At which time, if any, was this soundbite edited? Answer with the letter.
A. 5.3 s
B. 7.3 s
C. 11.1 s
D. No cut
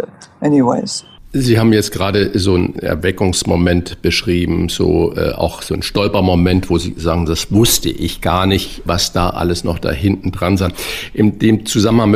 D